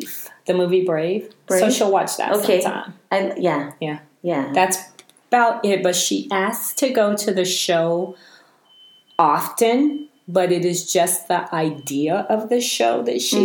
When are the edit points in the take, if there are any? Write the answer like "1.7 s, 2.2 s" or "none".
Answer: none